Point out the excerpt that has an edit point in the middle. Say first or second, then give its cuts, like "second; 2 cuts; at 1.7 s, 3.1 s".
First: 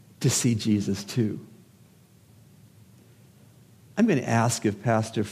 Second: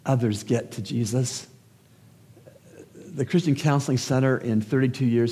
first; 1 cut; at 3.9 s